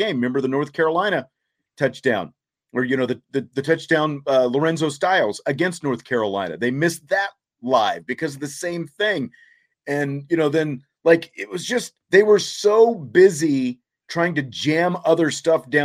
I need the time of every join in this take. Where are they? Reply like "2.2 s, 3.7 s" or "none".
12.0 s